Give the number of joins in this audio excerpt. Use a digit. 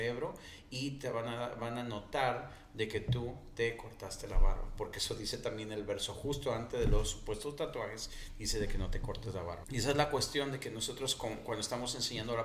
1